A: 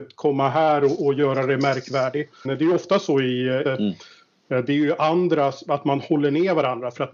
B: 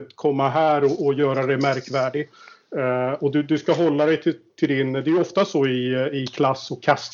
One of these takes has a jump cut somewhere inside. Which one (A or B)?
A